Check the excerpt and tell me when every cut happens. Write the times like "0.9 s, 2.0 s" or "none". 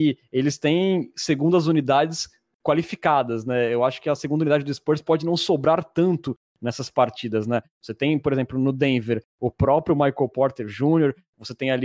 none